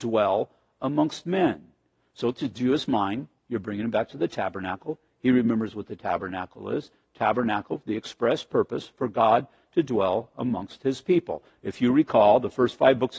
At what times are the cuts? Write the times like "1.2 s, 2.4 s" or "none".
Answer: none